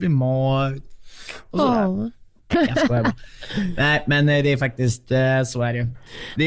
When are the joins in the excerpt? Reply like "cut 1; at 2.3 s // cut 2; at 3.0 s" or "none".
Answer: cut 1; at 2.5 s